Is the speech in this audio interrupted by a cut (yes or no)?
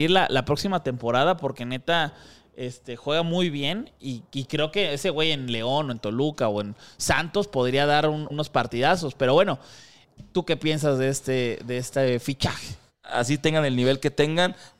yes